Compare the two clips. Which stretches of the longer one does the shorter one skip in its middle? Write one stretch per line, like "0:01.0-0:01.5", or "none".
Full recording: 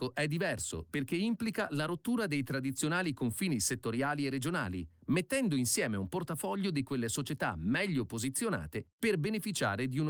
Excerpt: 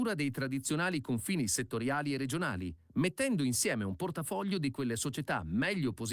none